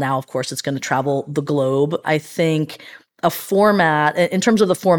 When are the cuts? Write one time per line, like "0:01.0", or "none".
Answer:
0:02.0

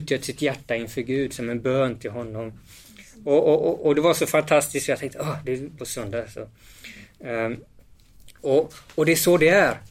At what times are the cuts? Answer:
0:05.8

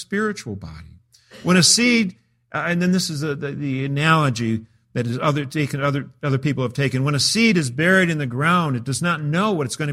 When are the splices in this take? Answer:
none

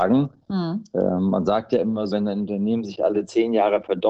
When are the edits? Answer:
0:02.1

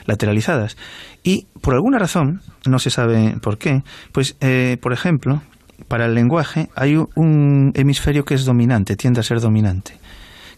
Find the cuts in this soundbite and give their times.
none

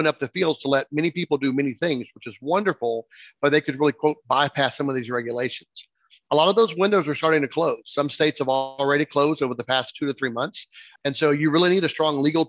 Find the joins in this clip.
0:11.0

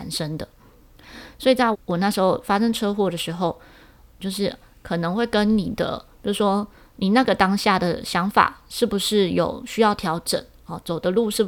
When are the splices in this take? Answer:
0:01.7
0:04.2

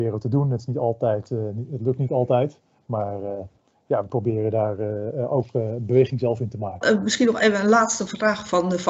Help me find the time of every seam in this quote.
0:06.8

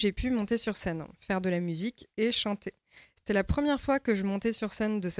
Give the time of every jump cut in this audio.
none

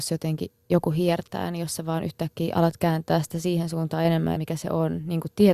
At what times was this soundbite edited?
0:04.4

